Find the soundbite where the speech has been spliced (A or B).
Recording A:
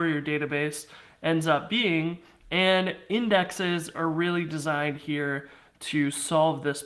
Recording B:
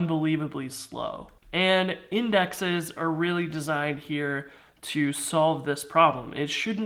B